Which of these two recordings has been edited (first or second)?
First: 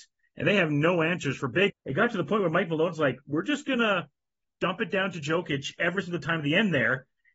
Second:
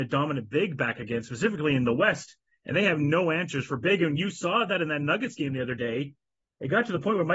first